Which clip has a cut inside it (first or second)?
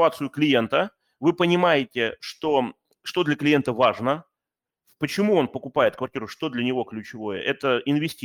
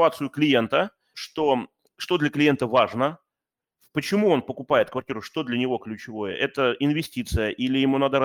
second